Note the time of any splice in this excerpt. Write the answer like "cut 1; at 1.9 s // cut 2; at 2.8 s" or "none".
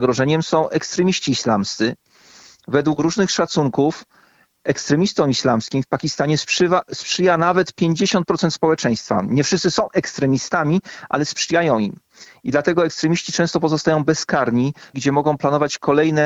cut 1; at 14.9 s